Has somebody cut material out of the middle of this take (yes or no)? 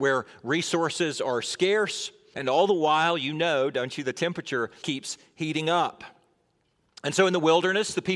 yes